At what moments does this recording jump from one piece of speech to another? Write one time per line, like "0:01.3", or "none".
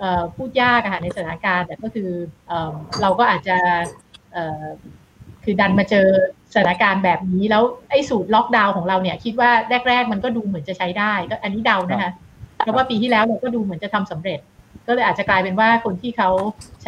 0:02.4